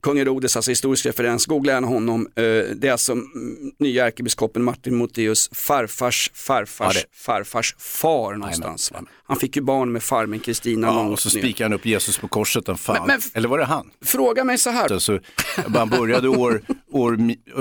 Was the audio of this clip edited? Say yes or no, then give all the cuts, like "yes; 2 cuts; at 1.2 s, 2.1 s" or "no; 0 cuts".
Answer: yes; 1 cut; at 14.9 s